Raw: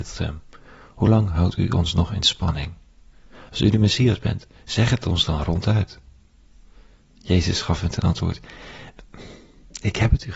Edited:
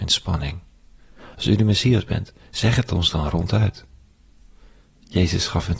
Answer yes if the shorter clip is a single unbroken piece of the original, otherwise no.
yes